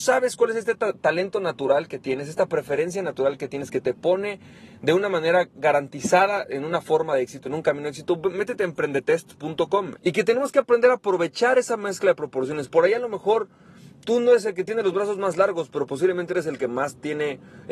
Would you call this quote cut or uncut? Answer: cut